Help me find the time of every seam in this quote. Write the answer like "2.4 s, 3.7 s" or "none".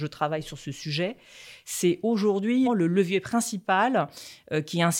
2.7 s